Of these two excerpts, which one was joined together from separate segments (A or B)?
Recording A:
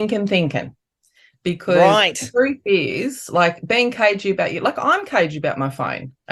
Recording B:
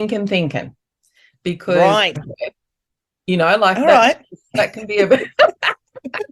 B